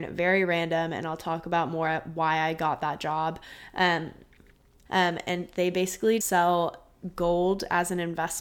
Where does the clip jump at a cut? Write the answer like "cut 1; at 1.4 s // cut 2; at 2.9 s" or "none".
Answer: cut 1; at 4.9 s // cut 2; at 6.2 s

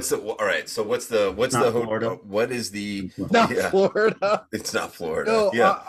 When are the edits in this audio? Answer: cut 1; at 3.3 s

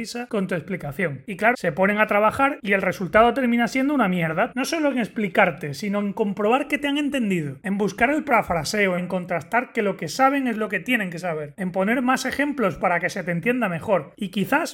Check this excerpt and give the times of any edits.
cut 1; at 1.5 s // cut 2; at 4.5 s // cut 3; at 9.0 s

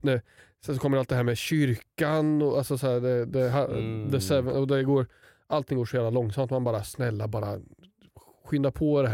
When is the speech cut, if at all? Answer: none

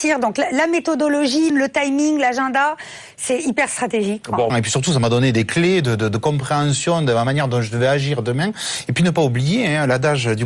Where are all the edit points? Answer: cut 1; at 1.5 s // cut 2; at 4.5 s

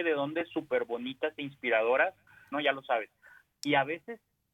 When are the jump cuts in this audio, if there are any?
cut 1; at 2.5 s

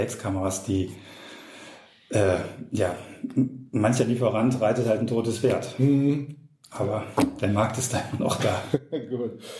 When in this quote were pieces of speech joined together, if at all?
none

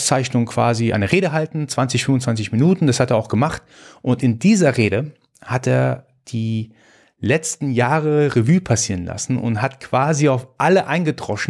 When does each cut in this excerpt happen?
cut 1; at 0.9 s

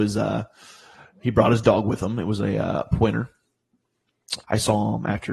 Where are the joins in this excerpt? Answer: cut 1; at 4.4 s

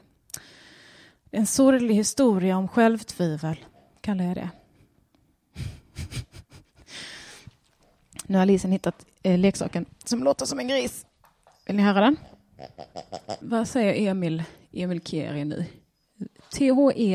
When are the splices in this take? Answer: cut 1; at 13.4 s

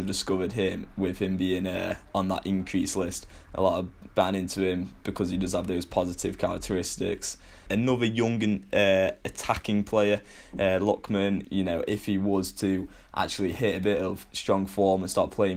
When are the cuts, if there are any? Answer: cut 1; at 4.1 s // cut 2; at 7.7 s // cut 3; at 11.4 s

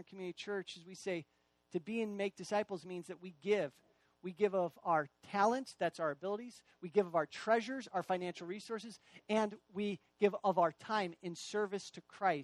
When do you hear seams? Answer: none

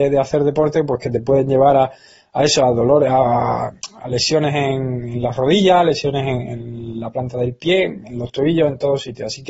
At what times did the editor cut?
none

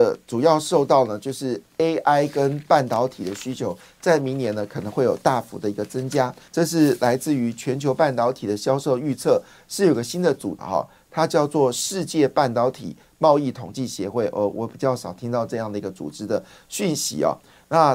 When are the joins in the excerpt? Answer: cut 1; at 6.5 s // cut 2; at 10.6 s

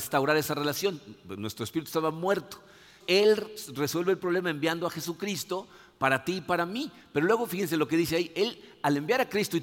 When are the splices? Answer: cut 1; at 3.0 s

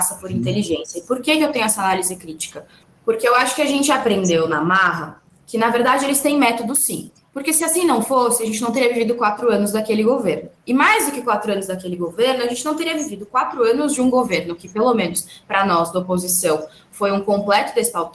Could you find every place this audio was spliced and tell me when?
none

